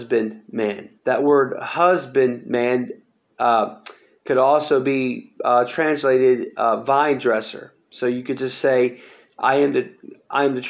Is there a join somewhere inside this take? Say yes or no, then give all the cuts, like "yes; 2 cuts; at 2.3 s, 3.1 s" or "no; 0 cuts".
yes; 1 cut; at 1.0 s